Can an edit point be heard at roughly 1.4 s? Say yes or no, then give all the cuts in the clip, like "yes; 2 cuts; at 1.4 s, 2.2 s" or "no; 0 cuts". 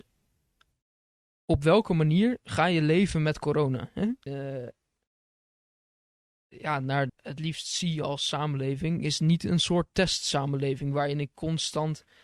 no; 2 cuts; at 4.3 s, 7.1 s